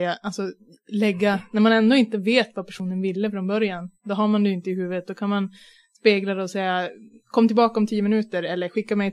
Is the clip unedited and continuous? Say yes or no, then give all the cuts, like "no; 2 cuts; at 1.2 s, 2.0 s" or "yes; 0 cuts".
yes; 0 cuts